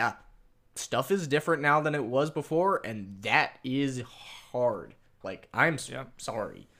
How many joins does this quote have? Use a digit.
1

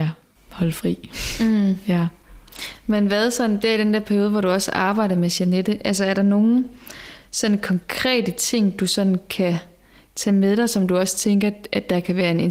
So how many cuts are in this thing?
0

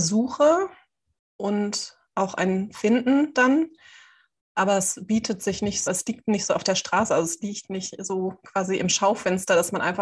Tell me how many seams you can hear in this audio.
1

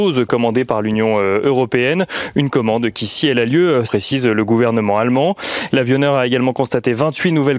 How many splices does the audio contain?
2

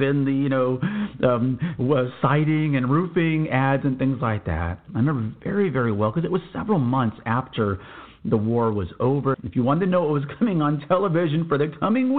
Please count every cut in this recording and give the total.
2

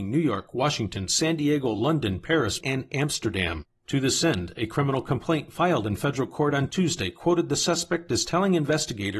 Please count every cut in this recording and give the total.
2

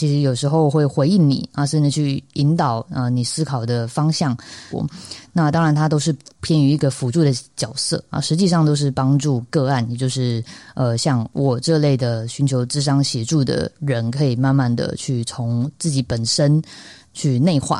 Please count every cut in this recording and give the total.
1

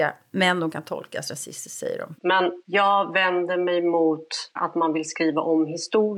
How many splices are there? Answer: 1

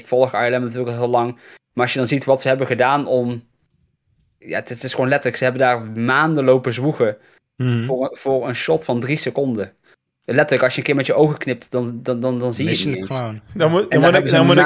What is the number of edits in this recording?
0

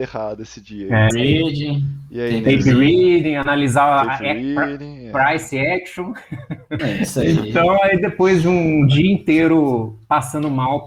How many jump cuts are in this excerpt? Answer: 2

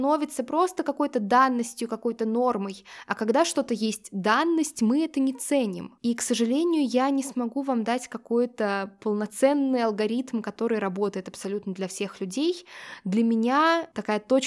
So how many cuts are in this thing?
1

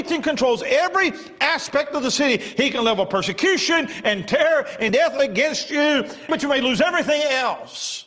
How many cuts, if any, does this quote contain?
2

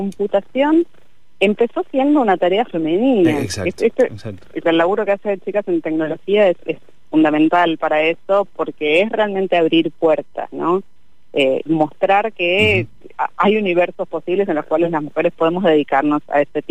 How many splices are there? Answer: 2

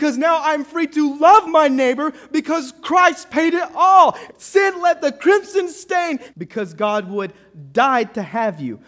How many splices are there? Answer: 2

